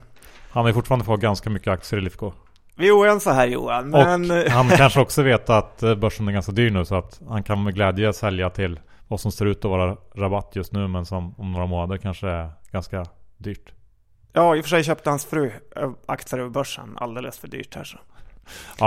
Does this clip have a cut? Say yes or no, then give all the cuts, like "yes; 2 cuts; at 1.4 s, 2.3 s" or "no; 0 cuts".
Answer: no; 0 cuts